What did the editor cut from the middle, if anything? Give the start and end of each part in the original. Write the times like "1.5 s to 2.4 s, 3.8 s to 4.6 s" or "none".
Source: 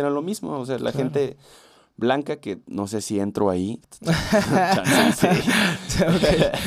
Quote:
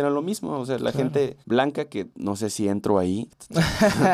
1.4 s to 1.9 s